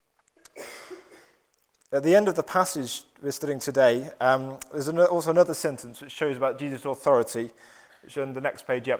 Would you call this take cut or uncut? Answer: uncut